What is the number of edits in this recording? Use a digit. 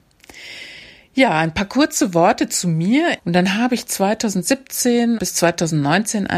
2